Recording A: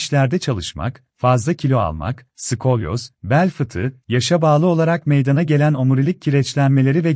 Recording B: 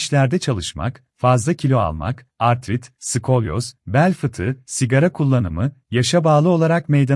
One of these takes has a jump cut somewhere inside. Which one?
A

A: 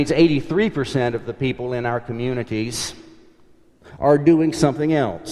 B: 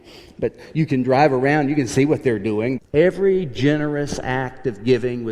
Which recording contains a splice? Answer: B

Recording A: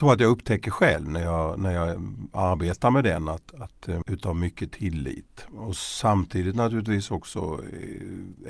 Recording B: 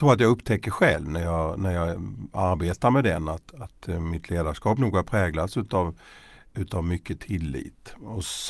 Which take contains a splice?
A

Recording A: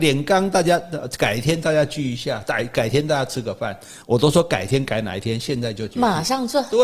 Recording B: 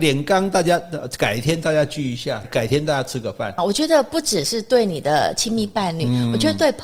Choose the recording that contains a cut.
B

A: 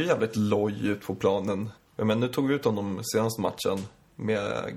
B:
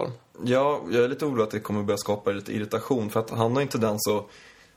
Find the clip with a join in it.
A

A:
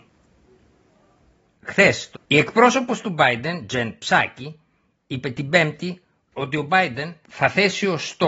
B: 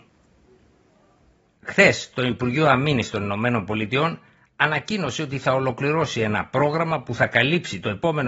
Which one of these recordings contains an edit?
A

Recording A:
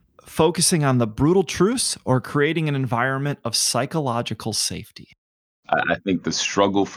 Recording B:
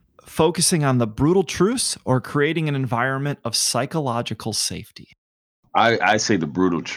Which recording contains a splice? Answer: A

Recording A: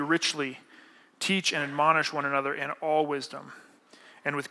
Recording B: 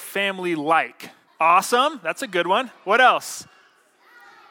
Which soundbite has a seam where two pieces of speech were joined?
B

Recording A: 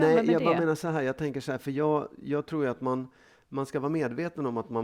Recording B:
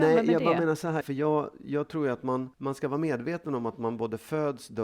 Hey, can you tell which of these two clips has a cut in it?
B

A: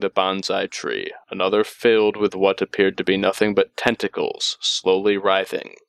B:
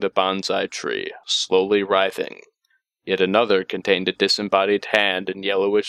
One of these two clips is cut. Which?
B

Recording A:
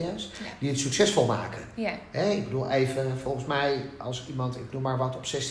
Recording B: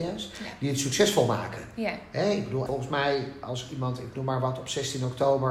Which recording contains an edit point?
B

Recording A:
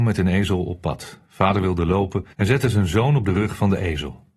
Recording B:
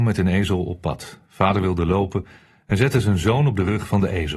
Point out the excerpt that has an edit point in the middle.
A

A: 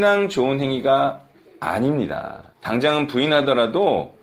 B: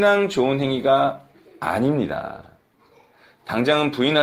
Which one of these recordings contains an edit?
A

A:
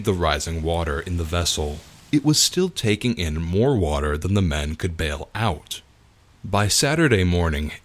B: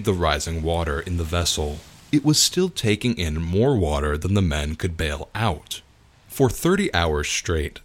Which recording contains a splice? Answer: B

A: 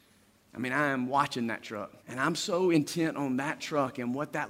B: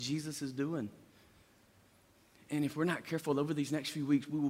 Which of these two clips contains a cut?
A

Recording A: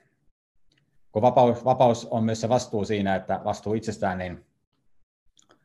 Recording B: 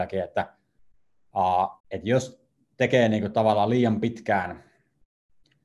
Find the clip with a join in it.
B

